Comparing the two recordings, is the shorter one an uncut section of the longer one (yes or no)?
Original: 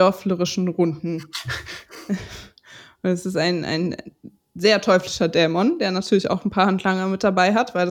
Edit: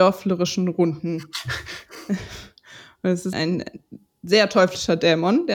no